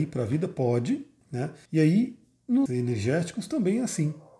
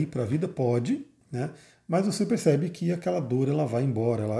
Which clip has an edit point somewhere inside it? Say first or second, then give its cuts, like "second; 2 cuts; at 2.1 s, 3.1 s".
first; 2 cuts; at 1.7 s, 2.7 s